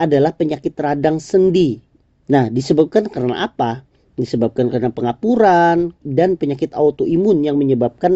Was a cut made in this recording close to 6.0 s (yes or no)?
yes